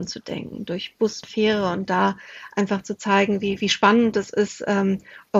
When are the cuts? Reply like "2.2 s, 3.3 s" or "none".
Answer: 1.2 s

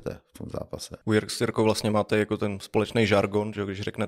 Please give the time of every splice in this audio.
1.0 s

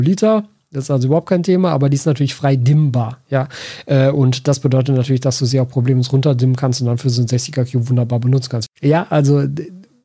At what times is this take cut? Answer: 8.7 s

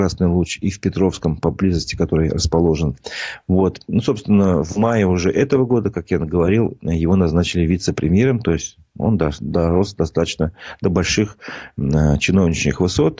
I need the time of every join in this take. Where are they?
none

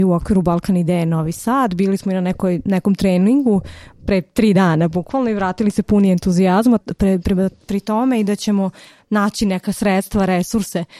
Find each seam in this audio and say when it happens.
6.8 s

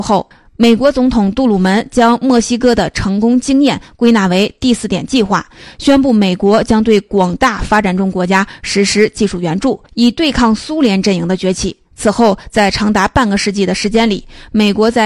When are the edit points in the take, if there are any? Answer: none

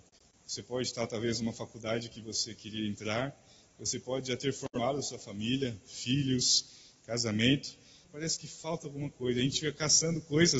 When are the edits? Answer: 8.0 s

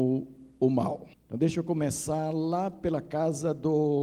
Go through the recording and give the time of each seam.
1.1 s

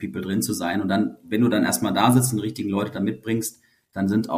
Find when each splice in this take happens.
none

